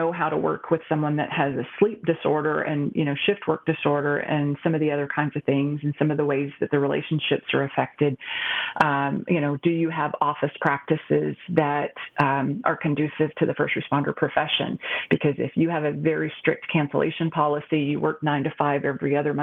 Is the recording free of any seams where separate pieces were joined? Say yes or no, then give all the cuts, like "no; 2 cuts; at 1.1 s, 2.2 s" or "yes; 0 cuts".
yes; 0 cuts